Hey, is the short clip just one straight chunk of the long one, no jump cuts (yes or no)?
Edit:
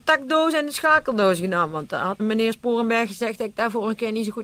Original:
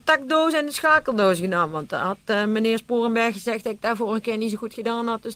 no